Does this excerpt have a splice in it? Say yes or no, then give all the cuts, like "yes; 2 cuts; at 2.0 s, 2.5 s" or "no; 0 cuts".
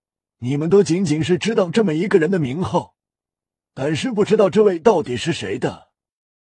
no; 0 cuts